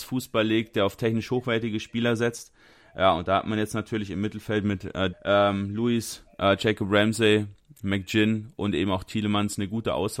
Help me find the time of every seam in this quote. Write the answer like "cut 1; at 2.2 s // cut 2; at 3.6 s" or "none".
cut 1; at 5.1 s